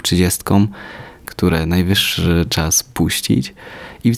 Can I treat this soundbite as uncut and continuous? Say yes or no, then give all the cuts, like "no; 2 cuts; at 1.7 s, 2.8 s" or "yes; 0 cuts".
no; 1 cut; at 1.2 s